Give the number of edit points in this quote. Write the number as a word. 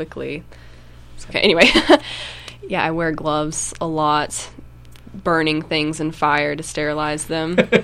one